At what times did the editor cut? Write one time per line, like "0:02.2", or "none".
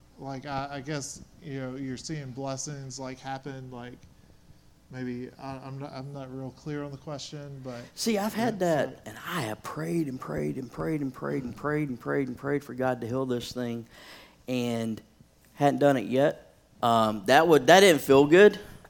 0:09.0
0:16.7